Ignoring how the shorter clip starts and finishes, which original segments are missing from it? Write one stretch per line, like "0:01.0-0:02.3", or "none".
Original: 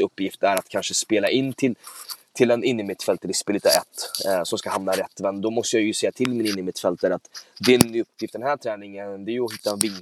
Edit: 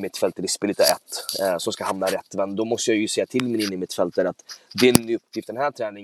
none